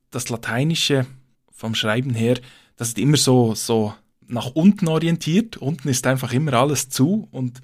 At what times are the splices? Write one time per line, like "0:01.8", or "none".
none

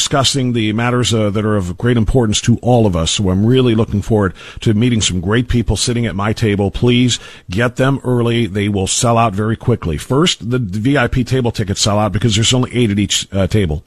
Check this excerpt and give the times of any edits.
none

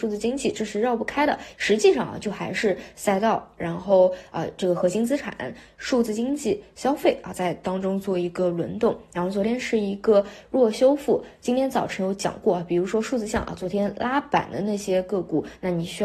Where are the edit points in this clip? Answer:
0:01.5

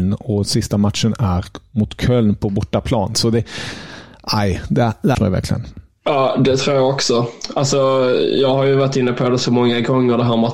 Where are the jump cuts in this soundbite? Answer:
0:05.1

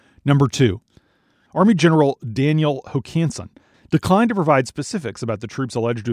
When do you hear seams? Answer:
0:01.5
0:03.7

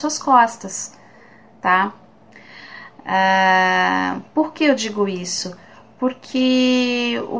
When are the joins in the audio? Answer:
none

